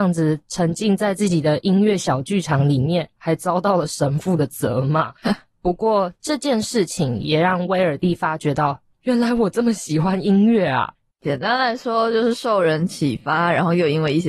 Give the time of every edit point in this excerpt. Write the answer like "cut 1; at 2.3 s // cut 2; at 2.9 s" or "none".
cut 1; at 3.2 s // cut 2; at 11.1 s